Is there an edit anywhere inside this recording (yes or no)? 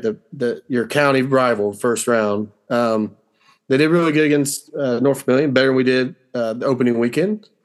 no